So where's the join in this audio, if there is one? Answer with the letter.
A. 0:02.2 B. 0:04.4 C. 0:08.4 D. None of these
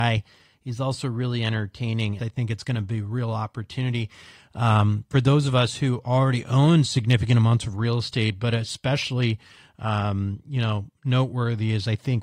A